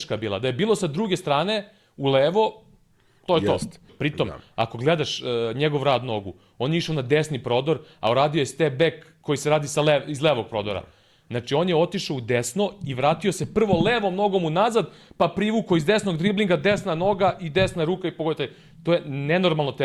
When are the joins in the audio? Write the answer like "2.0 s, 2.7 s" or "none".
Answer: 3.9 s

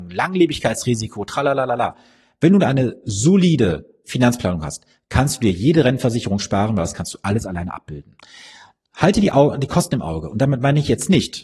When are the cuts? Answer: none

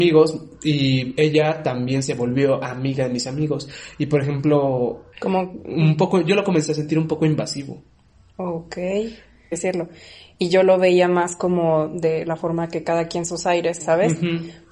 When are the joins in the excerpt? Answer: 9.5 s, 13.8 s

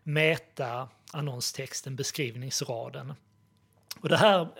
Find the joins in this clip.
1.1 s

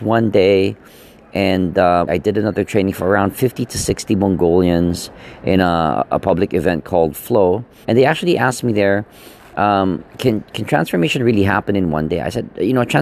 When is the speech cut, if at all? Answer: 2.1 s, 7.8 s

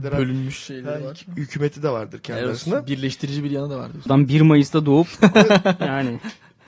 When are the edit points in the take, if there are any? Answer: 4.1 s

